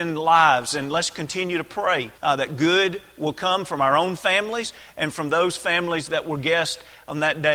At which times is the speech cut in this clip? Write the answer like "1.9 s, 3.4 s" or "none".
2.2 s